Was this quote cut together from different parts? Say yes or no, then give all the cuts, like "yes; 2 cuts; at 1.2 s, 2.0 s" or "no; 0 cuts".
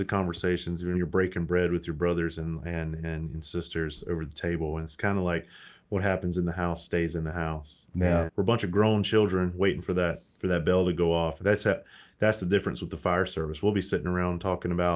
yes; 3 cuts; at 0.9 s, 8.3 s, 11.4 s